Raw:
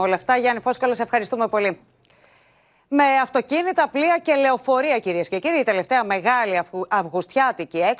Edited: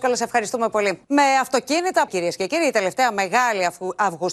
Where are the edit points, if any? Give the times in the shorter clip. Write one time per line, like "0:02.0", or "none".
0:01.0
0:02.1